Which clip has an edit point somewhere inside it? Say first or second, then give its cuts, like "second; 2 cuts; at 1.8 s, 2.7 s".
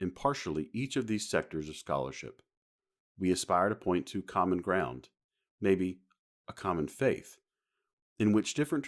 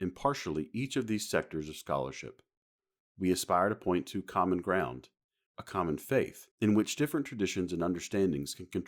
second; 2 cuts; at 5.5 s, 6.5 s